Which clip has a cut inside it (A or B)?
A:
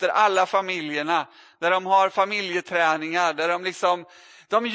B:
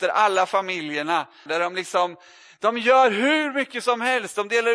B